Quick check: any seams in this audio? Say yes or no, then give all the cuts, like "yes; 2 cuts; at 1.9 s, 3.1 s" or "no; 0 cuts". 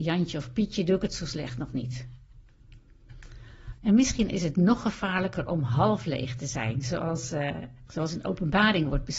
yes; 2 cuts; at 3.8 s, 7.9 s